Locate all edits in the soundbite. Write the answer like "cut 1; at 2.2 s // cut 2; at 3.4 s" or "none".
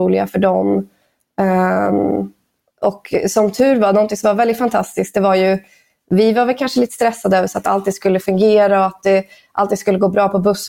none